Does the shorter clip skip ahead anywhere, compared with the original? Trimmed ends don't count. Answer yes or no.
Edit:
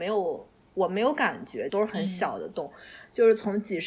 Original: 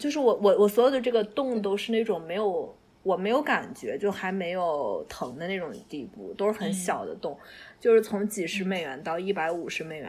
yes